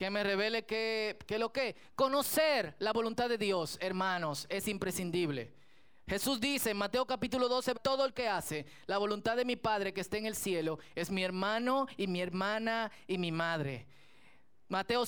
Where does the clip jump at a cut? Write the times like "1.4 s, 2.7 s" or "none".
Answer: 7.7 s